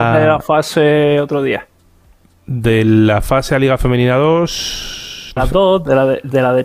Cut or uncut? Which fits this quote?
cut